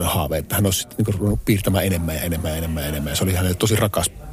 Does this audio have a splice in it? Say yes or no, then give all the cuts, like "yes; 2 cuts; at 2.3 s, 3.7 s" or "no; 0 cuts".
no; 0 cuts